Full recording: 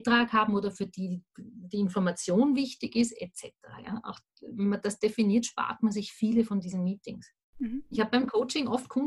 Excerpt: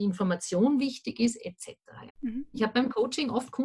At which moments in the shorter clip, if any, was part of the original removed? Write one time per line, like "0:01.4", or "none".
0:02.1